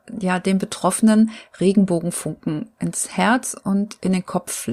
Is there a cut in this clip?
no; 0 cuts

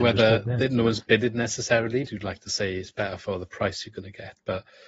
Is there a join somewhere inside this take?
yes; 1 cut; at 2.1 s

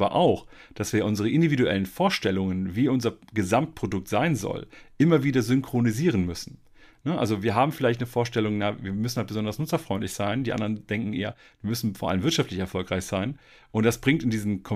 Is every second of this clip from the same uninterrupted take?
yes; 0 cuts

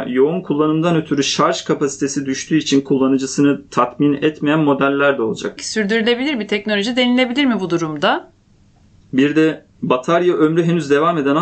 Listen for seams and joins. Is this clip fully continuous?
no; 2 cuts; at 5.6 s, 9.0 s

